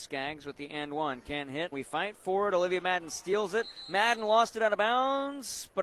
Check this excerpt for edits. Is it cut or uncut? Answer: cut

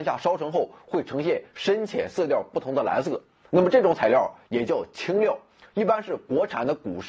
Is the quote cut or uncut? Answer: uncut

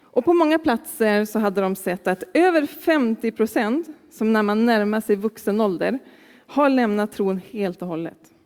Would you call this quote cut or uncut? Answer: uncut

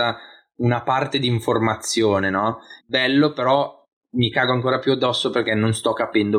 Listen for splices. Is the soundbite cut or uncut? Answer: cut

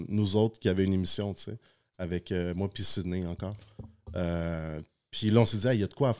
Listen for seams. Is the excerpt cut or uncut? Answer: uncut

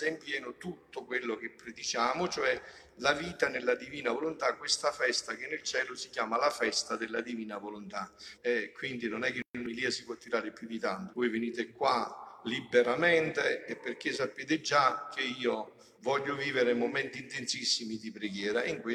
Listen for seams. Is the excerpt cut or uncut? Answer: cut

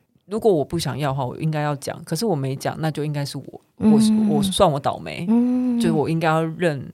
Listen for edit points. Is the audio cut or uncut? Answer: uncut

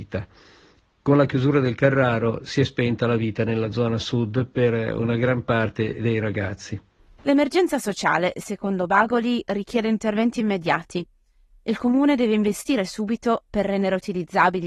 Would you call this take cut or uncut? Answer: uncut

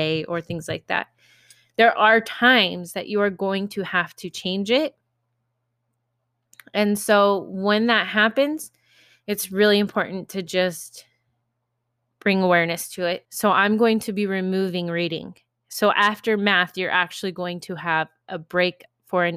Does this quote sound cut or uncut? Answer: cut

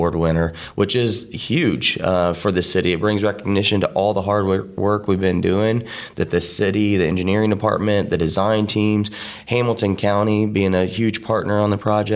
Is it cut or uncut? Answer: uncut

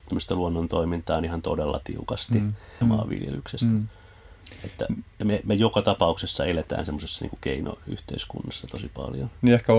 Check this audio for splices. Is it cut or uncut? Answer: cut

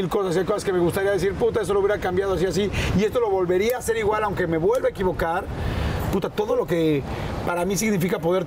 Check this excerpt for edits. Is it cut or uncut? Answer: uncut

